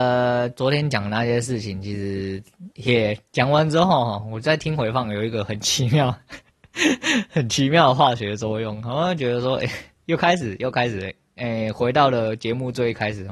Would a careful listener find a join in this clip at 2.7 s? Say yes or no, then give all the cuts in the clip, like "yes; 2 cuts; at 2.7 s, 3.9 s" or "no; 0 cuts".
yes; 1 cut; at 2.7 s